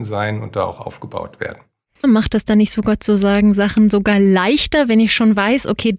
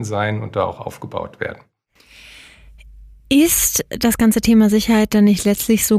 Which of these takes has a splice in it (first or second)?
first